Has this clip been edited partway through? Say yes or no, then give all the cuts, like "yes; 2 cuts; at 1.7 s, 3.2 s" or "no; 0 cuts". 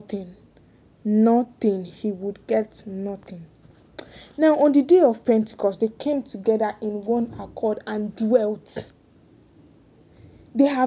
no; 0 cuts